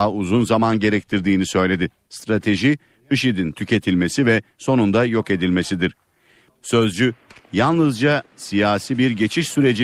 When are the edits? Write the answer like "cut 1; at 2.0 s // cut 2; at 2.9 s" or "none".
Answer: cut 1; at 2.1 s // cut 2; at 6.5 s